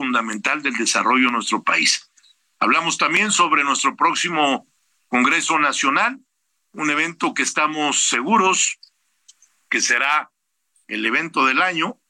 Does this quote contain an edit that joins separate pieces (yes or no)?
no